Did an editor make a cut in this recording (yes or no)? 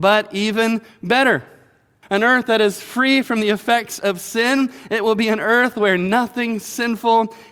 yes